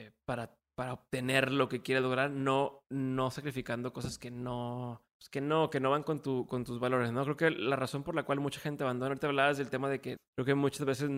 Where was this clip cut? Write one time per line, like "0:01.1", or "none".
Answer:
0:05.1
0:10.2